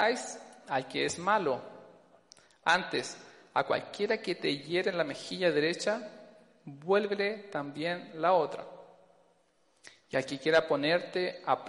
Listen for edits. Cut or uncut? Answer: uncut